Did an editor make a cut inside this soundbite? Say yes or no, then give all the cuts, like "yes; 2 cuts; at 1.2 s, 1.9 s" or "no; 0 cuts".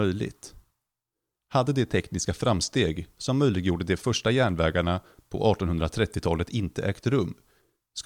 no; 0 cuts